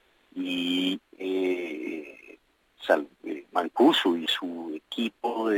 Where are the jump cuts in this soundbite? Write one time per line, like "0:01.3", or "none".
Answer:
0:01.0

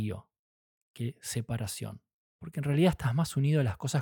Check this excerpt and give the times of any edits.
0:02.2

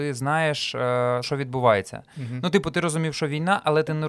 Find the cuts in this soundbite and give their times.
0:01.2

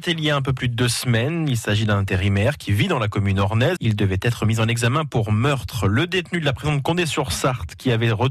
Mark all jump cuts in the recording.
0:03.8

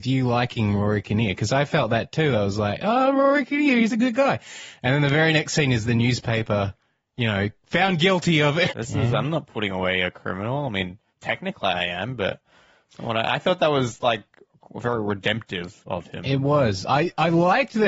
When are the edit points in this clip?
0:08.7

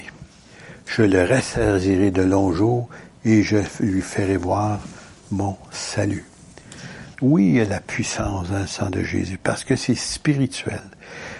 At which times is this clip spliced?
0:07.1

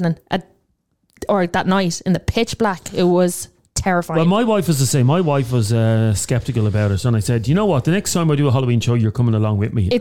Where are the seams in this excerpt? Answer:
none

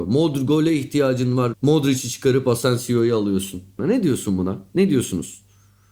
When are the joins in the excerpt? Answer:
0:01.5
0:03.8

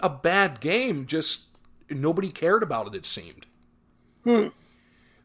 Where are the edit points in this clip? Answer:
none

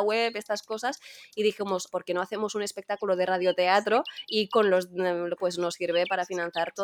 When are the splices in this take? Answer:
0:01.9
0:05.4

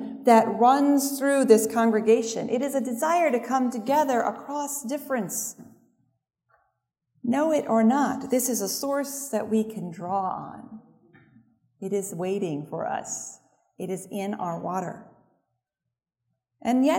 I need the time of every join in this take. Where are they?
none

